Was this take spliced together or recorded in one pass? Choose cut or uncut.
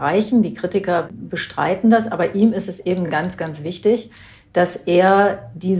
uncut